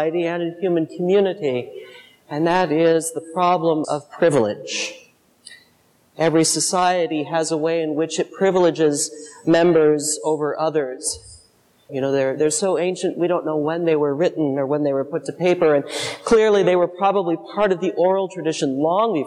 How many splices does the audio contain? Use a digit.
2